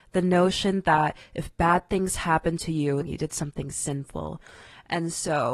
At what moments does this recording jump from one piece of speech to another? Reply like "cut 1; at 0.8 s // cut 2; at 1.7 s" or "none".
cut 1; at 3.0 s